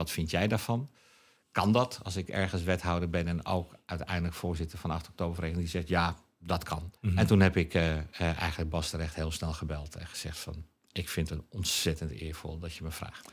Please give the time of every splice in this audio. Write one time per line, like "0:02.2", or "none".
0:07.0